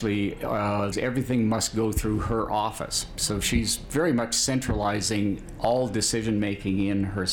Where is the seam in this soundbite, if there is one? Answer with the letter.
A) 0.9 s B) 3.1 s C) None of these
A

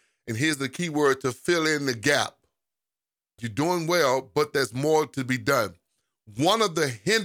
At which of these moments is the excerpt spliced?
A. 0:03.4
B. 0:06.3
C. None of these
A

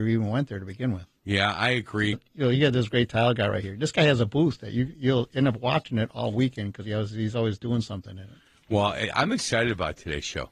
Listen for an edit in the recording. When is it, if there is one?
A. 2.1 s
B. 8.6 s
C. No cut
A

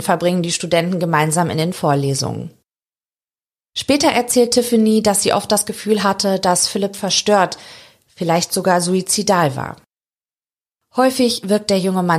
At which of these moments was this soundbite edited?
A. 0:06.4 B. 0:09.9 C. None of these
C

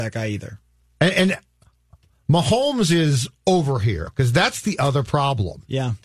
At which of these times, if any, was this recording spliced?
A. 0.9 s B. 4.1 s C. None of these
B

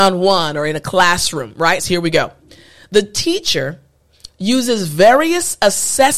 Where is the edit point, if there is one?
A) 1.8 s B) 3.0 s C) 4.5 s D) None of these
A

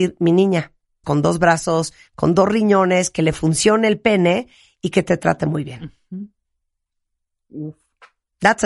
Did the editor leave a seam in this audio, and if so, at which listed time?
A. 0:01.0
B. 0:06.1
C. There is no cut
A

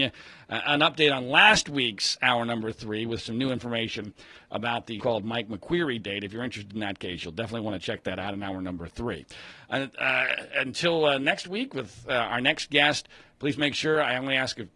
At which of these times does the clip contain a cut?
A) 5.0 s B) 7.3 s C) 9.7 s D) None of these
A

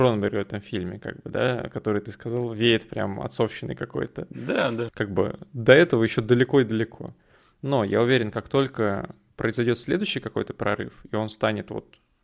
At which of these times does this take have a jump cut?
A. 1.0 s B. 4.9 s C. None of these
B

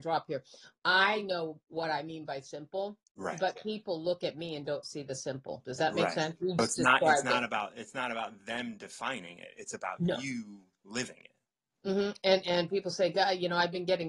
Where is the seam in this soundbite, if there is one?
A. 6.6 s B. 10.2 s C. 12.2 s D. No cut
A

